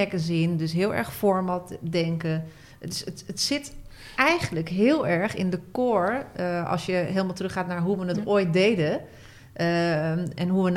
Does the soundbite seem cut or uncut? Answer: uncut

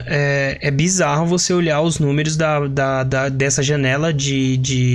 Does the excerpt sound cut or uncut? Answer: uncut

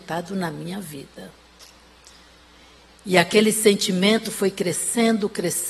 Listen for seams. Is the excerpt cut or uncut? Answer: uncut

